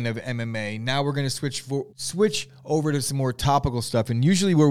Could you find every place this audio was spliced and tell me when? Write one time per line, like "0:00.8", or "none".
0:01.9